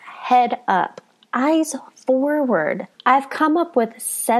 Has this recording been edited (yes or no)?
yes